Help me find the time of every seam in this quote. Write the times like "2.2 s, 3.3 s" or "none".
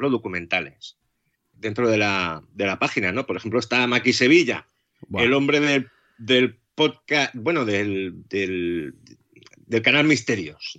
1.5 s

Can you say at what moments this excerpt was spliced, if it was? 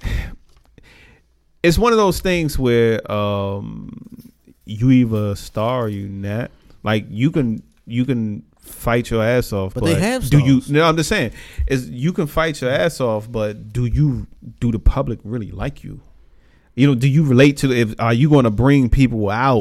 none

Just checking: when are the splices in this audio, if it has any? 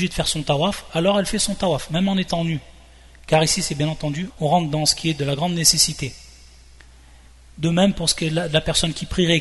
4.3 s

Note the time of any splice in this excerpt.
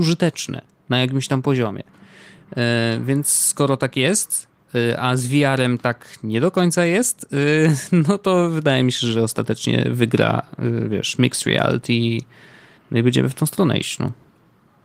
none

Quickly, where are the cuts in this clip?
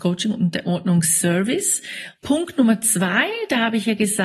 2.2 s

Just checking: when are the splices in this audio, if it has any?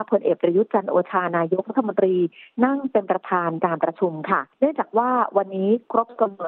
4.5 s

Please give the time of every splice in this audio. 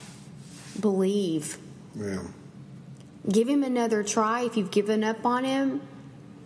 3.2 s

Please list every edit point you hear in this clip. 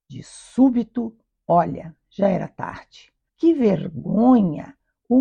3.3 s

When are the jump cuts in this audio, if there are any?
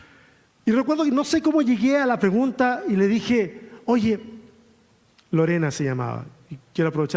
none

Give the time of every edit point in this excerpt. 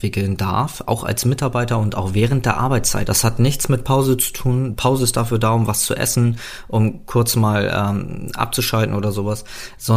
3.0 s

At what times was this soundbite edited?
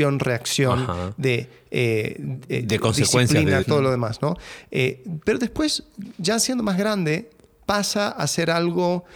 3.6 s

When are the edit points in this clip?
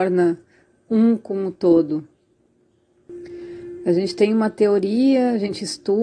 3.8 s

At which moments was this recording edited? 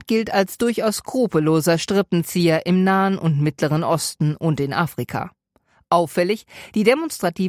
none

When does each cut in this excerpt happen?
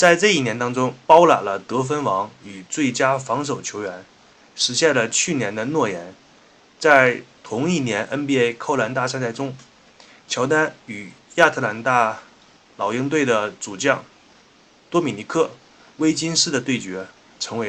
1.0 s

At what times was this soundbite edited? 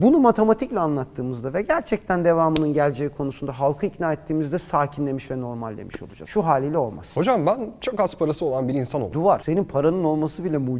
none

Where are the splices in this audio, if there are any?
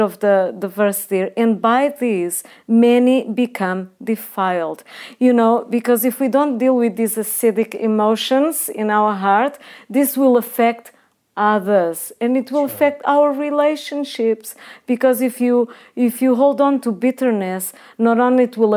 none

